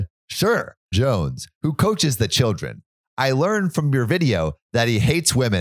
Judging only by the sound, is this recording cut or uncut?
cut